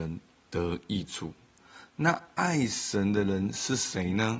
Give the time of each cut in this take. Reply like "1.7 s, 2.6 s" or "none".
none